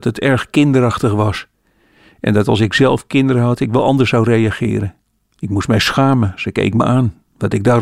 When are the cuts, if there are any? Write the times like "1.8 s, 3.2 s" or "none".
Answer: none

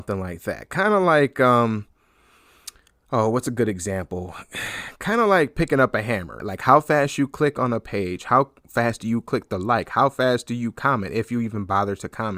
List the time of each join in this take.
6.4 s

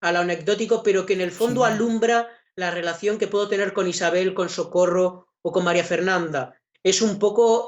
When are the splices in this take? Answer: 6.7 s

